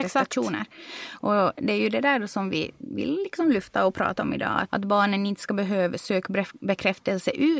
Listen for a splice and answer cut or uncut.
cut